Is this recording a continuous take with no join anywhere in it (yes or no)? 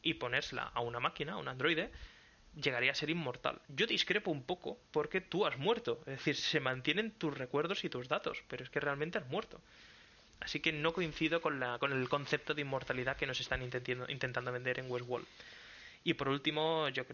no